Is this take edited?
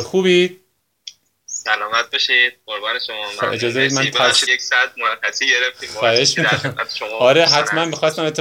yes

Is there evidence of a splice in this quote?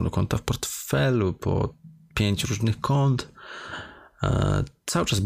no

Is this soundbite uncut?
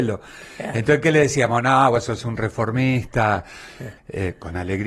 no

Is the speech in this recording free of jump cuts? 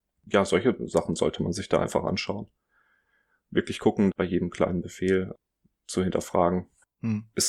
no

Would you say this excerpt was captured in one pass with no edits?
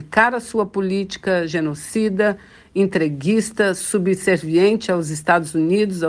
yes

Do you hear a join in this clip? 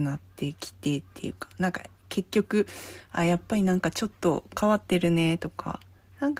no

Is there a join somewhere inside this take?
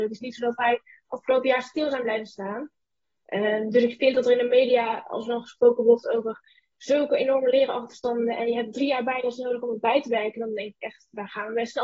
no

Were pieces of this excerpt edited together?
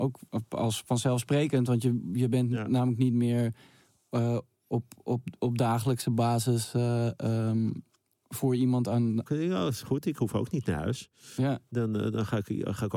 yes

